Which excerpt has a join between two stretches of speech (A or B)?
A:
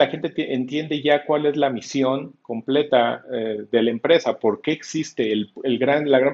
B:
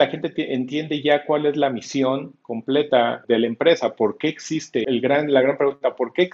B